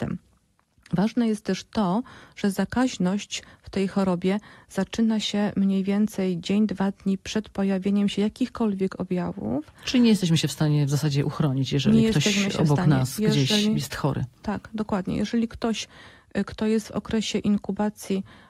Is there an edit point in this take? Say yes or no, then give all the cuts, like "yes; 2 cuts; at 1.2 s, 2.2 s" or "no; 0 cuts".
no; 0 cuts